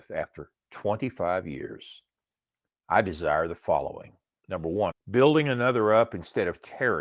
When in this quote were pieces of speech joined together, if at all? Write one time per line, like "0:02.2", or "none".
0:02.7
0:04.9

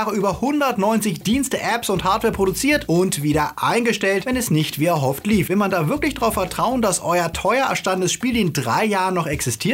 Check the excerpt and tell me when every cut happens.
none

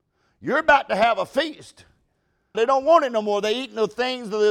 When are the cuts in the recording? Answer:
0:02.5

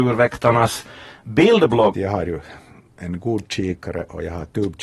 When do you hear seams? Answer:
0:01.9

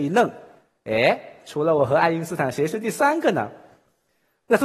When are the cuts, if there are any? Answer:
none

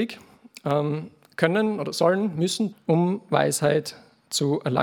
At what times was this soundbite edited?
0:02.7

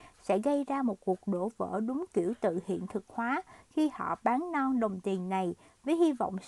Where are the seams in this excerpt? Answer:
none

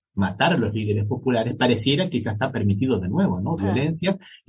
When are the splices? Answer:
0:03.6

